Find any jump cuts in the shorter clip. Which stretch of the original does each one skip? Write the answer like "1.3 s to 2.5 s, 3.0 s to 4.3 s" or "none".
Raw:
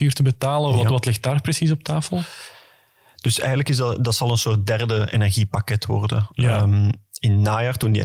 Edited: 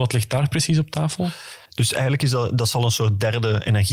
2.6 s to 3.1 s